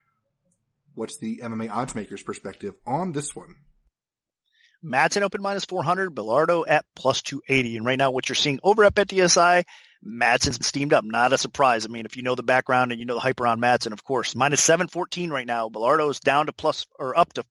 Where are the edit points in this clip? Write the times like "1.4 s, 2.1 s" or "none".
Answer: none